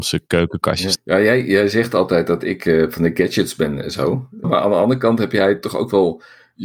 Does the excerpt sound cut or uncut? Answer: cut